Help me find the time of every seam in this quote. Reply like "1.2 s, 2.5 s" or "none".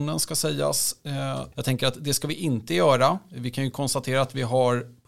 1.5 s